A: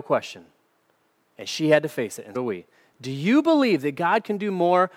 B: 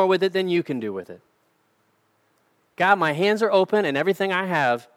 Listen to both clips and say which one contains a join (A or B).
A